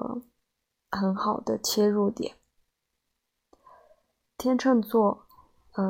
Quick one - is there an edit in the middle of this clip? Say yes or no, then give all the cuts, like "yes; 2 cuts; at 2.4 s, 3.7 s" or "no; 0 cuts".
yes; 1 cut; at 4.3 s